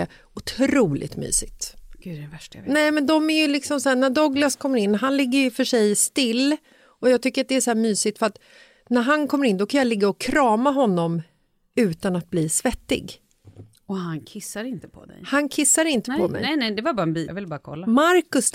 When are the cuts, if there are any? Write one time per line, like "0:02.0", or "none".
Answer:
0:17.3